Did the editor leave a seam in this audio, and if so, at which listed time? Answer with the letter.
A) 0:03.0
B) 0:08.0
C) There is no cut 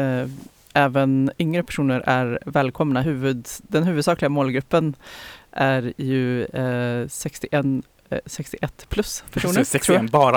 C